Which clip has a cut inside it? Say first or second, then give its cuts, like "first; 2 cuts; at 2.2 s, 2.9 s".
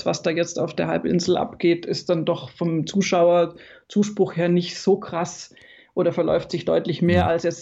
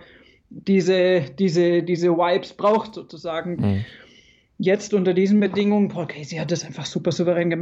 second; 1 cut; at 3.6 s